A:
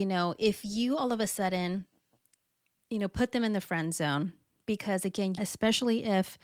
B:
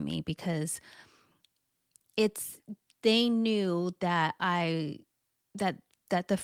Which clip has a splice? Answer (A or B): A